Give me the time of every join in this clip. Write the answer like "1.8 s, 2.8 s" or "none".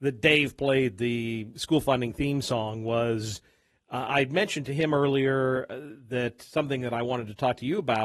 none